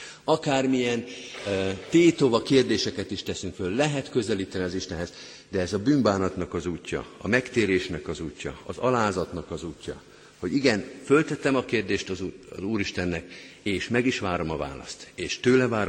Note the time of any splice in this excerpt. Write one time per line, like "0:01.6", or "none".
none